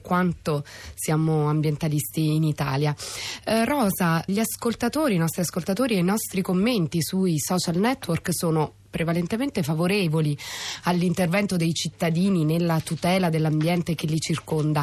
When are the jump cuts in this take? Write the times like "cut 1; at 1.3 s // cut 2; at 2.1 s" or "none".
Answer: cut 1; at 4.3 s